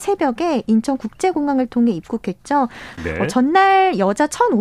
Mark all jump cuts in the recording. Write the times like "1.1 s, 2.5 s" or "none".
3.0 s